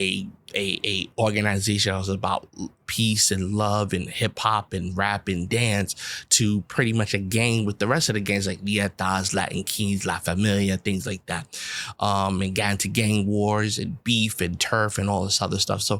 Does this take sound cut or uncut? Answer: uncut